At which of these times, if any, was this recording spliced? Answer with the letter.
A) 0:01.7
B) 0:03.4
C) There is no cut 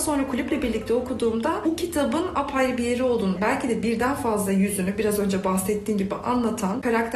B